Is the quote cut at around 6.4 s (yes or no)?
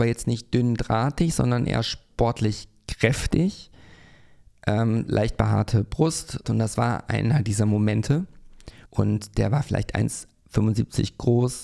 yes